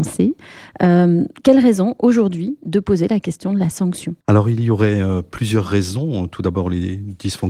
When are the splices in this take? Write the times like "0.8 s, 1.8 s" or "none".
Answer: 4.2 s